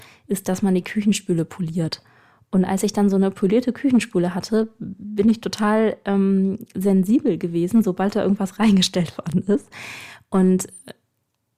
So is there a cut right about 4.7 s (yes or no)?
no